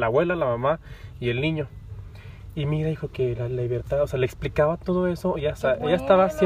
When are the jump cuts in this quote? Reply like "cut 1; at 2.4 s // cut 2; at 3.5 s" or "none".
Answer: cut 1; at 2.5 s

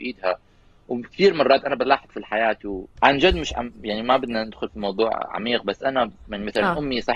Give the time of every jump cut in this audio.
cut 1; at 3.0 s

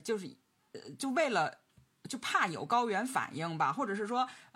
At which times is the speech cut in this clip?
none

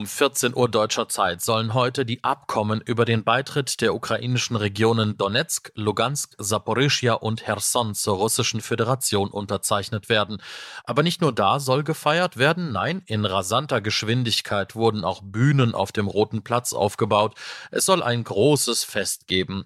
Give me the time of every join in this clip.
cut 1; at 10.8 s

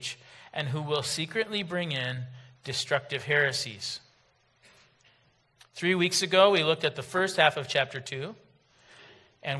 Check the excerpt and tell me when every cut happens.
none

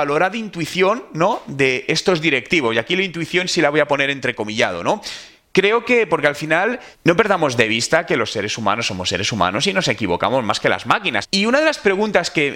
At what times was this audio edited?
cut 1; at 6.9 s // cut 2; at 11.2 s

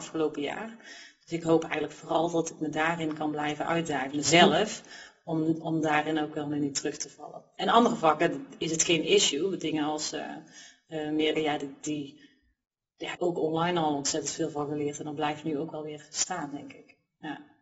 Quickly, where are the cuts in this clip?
cut 1; at 11.4 s // cut 2; at 13.2 s

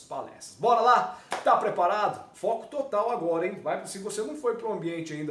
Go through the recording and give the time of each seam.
cut 1; at 2.3 s

